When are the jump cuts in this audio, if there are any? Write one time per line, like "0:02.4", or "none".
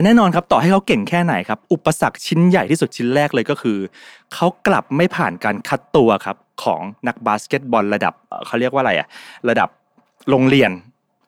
0:08.3